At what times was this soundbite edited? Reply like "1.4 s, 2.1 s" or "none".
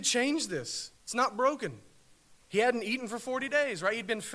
1.0 s, 2.4 s